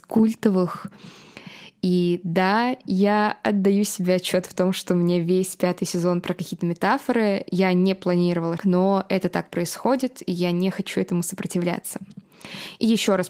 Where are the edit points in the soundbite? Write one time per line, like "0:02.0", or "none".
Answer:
0:08.6